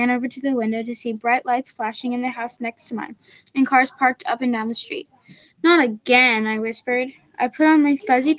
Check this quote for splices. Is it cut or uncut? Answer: uncut